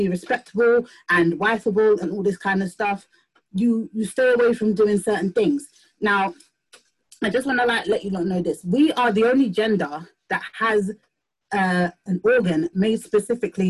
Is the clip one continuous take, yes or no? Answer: yes